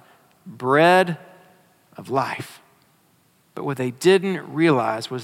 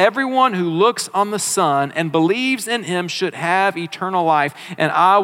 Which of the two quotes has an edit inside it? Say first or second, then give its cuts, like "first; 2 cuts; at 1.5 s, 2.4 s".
first; 1 cut; at 3.5 s